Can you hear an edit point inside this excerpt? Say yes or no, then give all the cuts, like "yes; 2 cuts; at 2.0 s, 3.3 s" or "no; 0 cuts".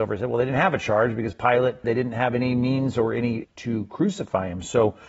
yes; 2 cuts; at 1.8 s, 3.4 s